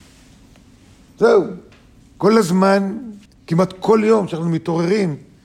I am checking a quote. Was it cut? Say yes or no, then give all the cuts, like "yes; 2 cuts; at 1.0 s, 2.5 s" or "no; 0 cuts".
yes; 2 cuts; at 2.0 s, 3.3 s